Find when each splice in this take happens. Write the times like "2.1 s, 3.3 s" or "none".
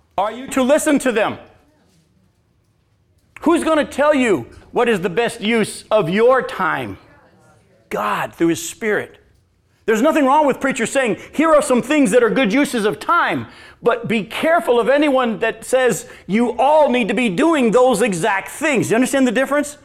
none

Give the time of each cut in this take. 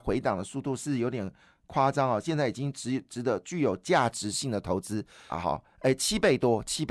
5.3 s

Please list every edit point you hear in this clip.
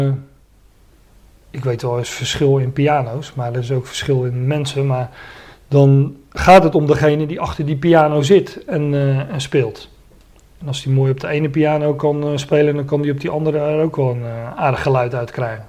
none

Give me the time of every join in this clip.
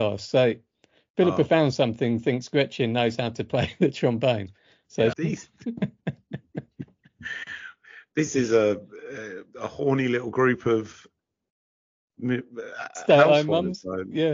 5.1 s

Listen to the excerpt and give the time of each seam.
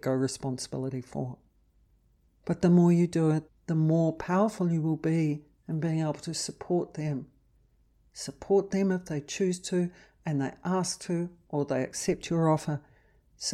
3.5 s

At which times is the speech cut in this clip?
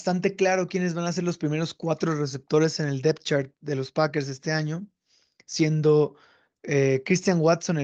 none

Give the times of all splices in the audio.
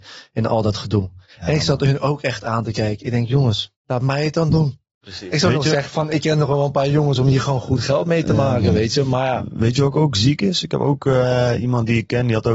3.8 s

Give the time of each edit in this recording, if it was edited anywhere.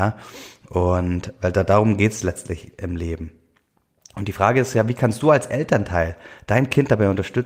none

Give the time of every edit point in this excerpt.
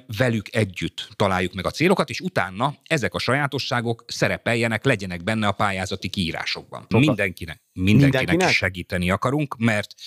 6.9 s

